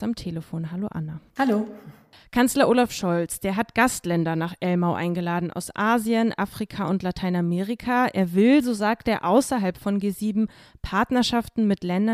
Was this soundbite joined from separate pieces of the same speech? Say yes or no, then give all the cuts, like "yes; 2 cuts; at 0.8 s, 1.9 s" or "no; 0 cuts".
no; 0 cuts